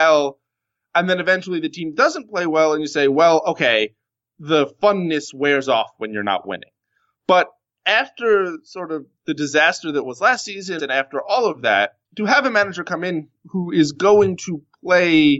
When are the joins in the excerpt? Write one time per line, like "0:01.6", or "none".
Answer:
0:10.8
0:12.0